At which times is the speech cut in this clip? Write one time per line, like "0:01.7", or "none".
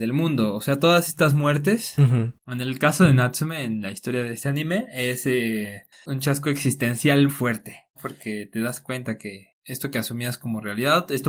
0:02.4
0:07.3